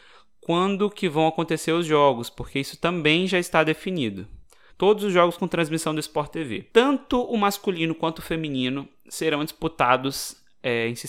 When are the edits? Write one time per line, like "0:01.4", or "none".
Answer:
0:04.7
0:06.7